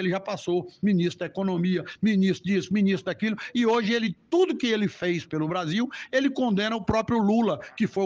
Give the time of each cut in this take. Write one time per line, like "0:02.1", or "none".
none